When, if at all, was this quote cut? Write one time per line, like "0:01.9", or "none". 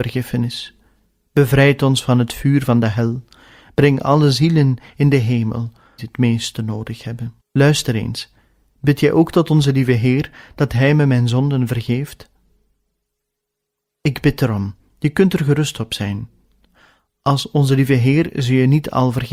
0:06.0
0:07.4